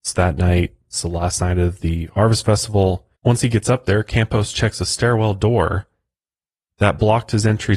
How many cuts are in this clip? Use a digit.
1